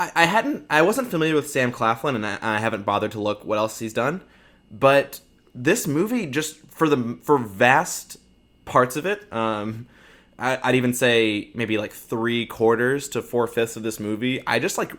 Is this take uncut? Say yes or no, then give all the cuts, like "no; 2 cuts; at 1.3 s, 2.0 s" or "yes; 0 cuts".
yes; 0 cuts